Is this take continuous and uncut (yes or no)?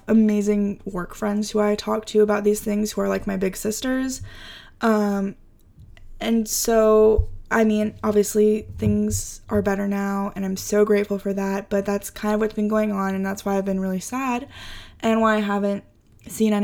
yes